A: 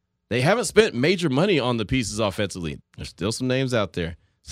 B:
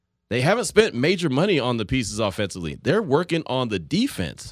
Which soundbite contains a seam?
A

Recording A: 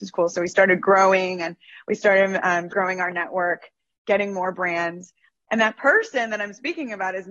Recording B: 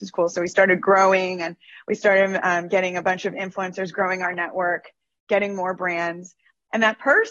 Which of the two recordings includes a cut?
A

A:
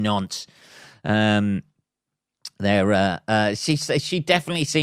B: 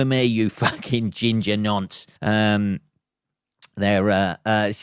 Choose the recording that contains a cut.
B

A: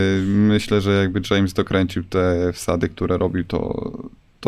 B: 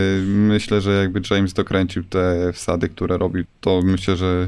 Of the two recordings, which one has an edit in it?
B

